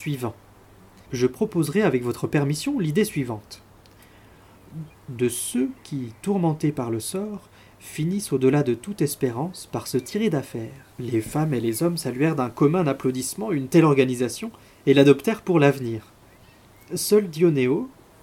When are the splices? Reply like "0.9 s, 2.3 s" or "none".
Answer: 1.1 s, 4.9 s, 10.9 s